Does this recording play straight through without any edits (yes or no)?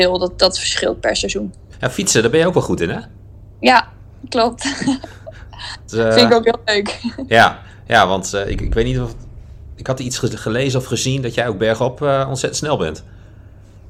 yes